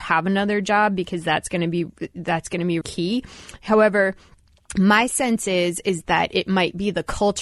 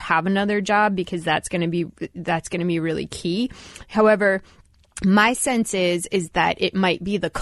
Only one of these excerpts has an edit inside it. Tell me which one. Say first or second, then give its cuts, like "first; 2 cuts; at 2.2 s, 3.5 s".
first; 1 cut; at 2.8 s